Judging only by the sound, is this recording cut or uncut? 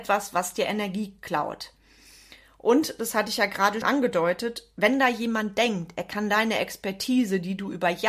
cut